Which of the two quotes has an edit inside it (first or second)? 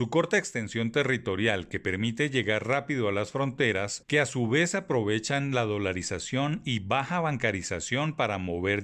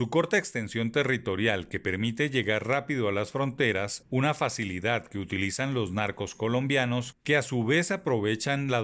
first